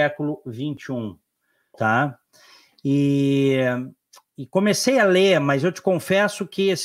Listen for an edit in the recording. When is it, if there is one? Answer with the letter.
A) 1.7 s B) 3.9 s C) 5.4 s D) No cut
A